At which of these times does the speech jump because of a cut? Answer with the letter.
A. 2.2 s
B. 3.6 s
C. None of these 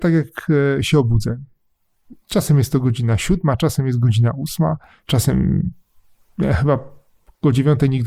C